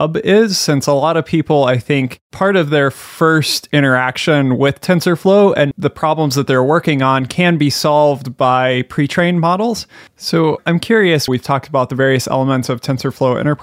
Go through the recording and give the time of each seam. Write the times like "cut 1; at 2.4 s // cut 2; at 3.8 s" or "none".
cut 1; at 5.7 s // cut 2; at 10.1 s // cut 3; at 11.3 s